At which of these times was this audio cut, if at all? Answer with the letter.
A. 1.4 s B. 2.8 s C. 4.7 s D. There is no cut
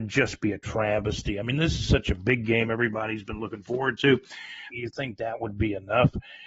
C